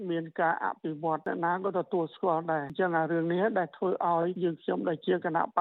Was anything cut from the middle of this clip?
no; 0 cuts

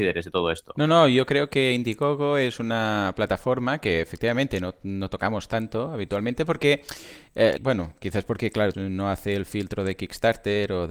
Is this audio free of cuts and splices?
no; 2 cuts; at 7.6 s, 8.7 s

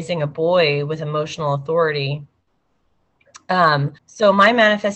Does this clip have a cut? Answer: yes; 1 cut; at 4.0 s

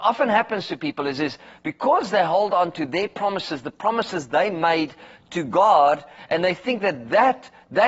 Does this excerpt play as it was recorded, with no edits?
yes; 0 cuts

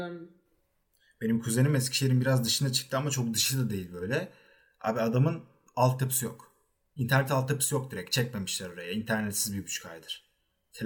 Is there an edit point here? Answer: no; 0 cuts

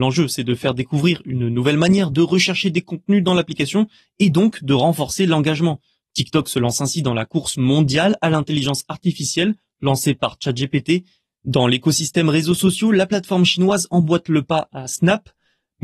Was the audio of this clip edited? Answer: no; 0 cuts

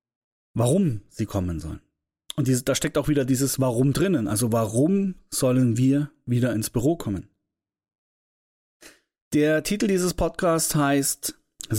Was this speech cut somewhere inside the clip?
no; 0 cuts

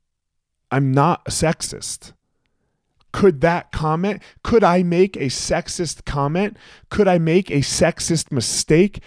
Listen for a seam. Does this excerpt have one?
no; 0 cuts

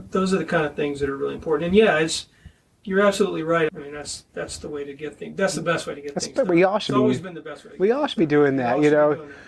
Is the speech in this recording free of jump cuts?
no; 1 cut; at 3.7 s

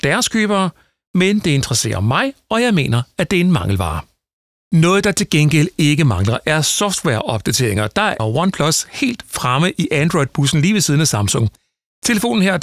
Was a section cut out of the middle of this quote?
yes; 1 cut; at 8.2 s

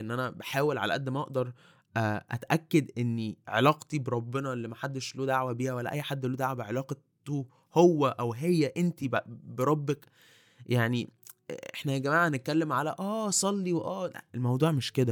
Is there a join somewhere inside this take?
no; 0 cuts

